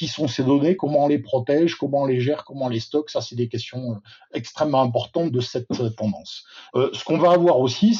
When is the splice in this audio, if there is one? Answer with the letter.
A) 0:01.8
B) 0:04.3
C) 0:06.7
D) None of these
C